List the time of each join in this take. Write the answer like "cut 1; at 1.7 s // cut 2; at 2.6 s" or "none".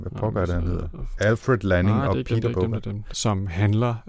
cut 1; at 1.2 s // cut 2; at 3.1 s